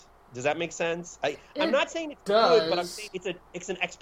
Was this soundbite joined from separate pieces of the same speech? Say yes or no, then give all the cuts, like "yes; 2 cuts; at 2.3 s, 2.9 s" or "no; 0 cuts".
yes; 1 cut; at 3.1 s